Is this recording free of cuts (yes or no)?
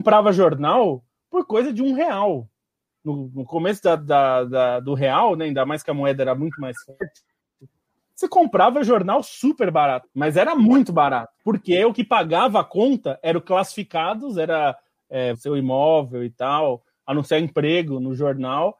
no